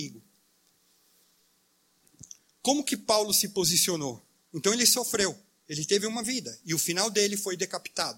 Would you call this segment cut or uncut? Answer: uncut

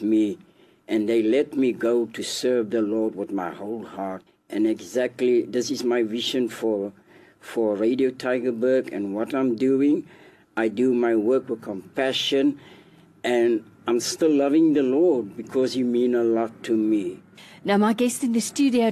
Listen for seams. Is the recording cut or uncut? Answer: uncut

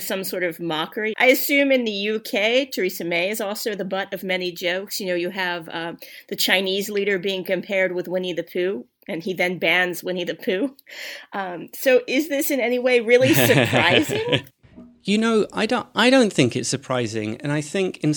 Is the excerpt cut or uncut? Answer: cut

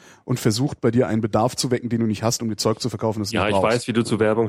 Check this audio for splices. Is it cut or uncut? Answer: uncut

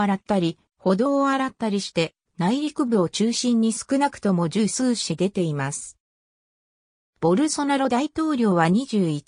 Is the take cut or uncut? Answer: cut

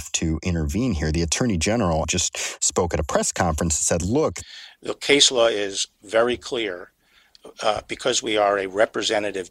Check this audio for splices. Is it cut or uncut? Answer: cut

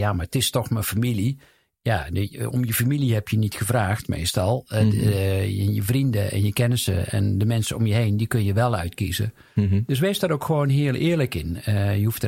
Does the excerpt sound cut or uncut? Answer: uncut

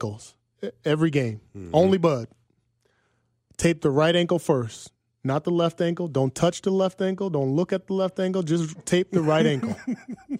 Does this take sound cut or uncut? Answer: uncut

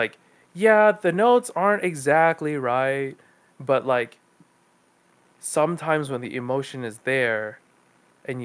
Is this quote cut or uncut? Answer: uncut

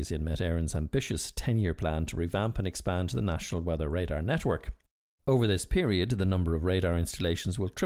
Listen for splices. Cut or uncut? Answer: uncut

